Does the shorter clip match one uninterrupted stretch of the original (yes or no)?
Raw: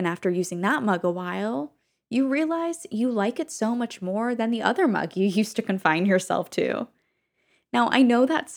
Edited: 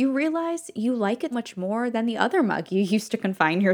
no